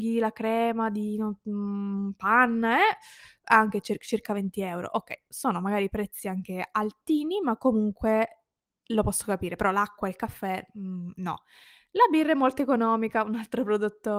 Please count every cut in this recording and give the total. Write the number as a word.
zero